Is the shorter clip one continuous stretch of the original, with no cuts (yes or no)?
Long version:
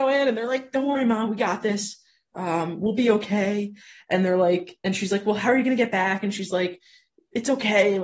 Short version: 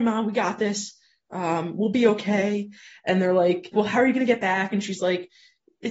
no